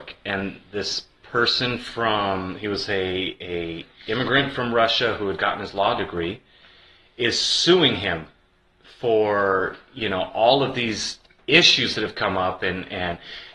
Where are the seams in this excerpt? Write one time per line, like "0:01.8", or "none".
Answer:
none